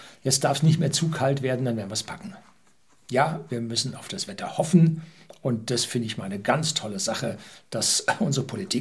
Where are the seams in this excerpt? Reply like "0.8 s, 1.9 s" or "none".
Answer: none